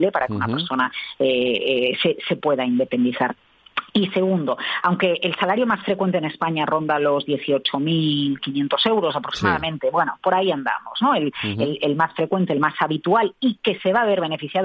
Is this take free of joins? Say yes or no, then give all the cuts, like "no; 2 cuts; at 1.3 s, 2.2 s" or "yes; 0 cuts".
yes; 0 cuts